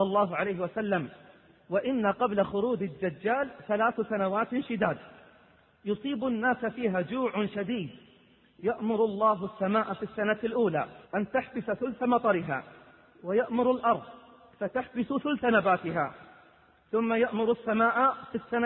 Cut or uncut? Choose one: cut